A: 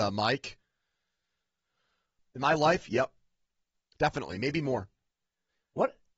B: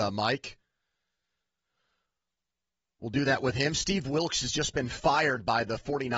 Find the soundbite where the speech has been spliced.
A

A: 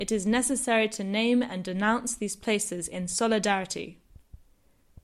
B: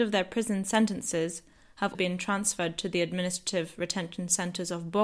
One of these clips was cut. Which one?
B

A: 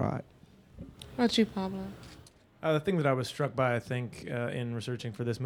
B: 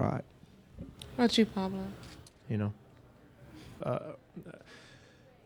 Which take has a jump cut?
B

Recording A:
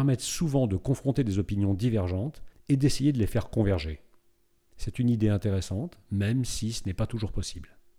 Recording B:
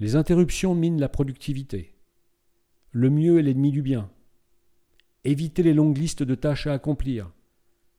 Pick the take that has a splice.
A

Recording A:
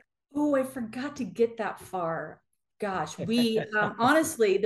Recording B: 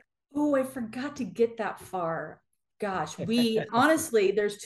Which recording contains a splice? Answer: B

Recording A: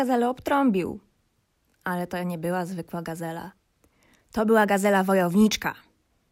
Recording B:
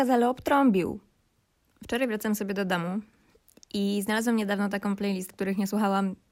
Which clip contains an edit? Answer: B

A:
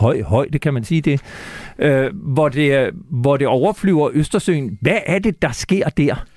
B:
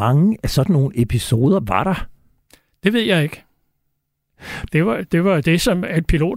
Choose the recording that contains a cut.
B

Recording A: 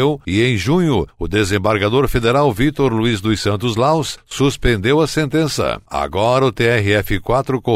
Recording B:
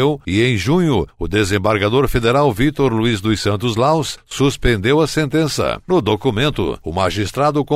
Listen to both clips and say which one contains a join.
B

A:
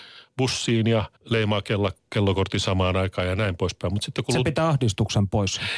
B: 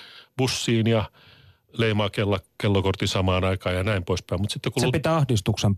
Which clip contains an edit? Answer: A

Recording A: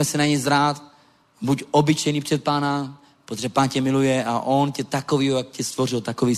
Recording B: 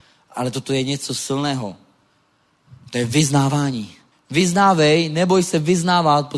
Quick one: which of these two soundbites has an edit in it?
B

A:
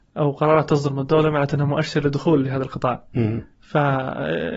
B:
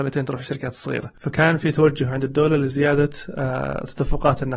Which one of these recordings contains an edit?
B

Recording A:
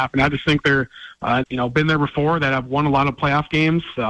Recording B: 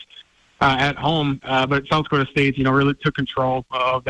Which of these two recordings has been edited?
A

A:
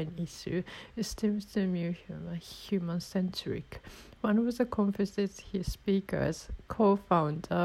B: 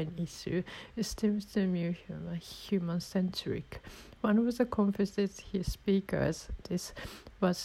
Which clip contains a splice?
B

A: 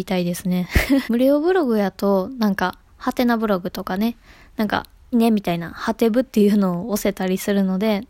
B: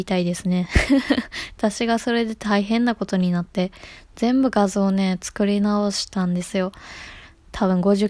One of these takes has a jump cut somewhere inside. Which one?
A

